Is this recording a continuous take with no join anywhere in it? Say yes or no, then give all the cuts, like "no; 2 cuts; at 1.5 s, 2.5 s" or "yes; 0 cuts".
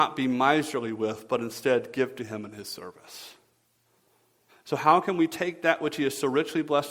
no; 1 cut; at 4.5 s